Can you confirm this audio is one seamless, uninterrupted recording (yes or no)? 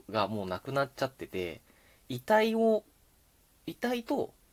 yes